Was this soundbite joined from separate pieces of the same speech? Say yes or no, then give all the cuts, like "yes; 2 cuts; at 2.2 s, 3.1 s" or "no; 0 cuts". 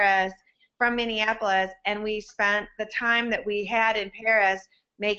no; 0 cuts